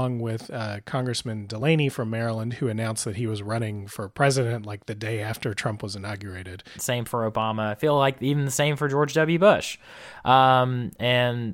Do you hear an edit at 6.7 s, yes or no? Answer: yes